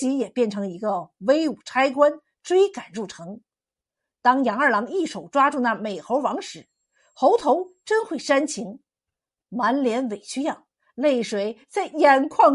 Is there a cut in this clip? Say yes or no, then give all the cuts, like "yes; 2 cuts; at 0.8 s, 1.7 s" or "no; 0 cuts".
no; 0 cuts